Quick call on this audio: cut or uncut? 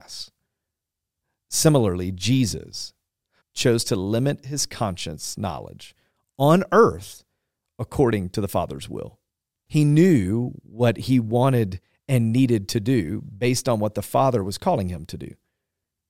cut